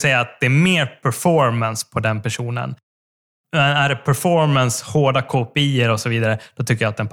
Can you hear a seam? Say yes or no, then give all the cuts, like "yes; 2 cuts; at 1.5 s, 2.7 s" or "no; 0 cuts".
no; 0 cuts